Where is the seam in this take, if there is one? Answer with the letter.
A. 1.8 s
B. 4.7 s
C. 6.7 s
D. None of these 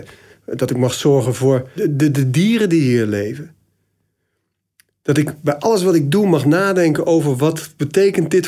A